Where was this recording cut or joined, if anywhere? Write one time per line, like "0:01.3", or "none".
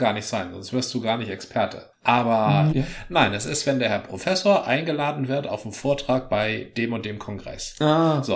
0:02.7